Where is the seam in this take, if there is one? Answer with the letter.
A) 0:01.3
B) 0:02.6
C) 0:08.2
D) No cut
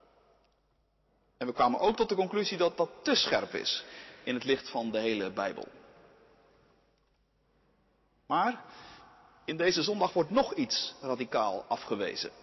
D